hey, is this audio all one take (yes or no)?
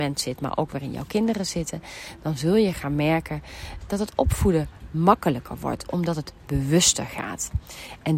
no